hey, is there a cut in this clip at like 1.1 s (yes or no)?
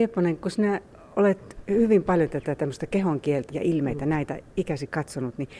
no